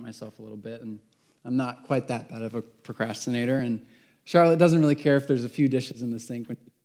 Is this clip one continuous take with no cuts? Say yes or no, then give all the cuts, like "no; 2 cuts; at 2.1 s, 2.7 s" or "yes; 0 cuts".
yes; 0 cuts